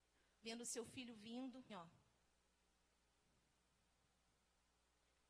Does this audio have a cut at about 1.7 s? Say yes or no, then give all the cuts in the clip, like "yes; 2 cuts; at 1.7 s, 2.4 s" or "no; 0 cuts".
yes; 1 cut; at 1.7 s